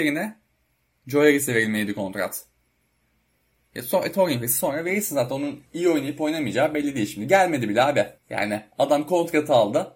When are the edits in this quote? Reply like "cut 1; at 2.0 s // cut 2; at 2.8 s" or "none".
cut 1; at 5.7 s // cut 2; at 8.2 s